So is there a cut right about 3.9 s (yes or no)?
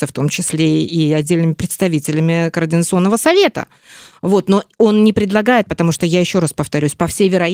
no